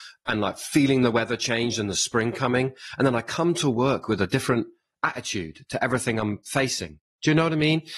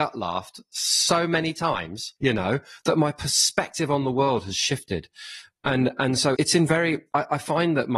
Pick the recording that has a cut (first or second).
second